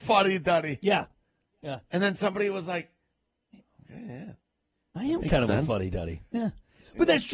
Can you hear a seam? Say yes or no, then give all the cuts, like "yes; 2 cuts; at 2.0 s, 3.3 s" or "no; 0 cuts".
no; 0 cuts